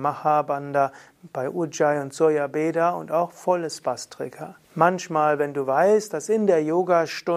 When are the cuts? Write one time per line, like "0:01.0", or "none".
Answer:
0:04.6